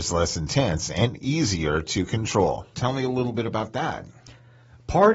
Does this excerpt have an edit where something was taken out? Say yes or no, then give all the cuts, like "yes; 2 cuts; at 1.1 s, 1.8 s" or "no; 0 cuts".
yes; 1 cut; at 2.7 s